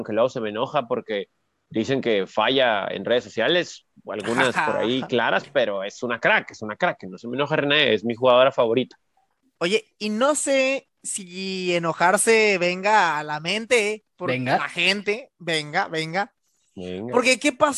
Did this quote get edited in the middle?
no; 0 cuts

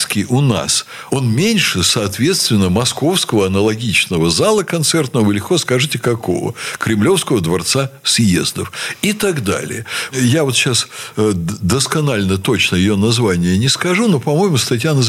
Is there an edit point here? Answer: yes; 1 cut; at 10.1 s

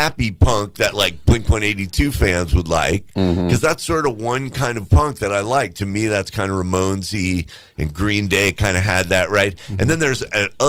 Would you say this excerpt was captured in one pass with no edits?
yes; 0 cuts

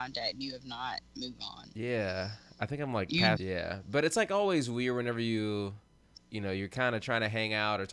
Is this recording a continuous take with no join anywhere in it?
no; 2 cuts; at 3.4 s, 6.2 s

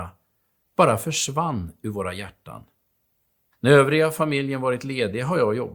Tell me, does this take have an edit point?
yes; 1 cut; at 3.5 s

